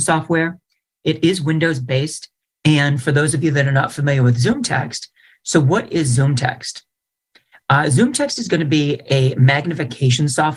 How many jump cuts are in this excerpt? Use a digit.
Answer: 1